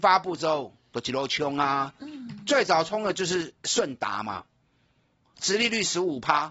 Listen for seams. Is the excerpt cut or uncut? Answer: cut